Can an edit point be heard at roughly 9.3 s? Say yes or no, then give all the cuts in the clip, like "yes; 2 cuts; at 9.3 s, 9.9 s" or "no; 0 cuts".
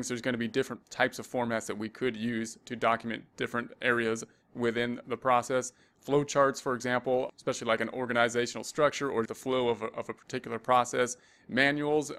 yes; 2 cuts; at 7.3 s, 9.3 s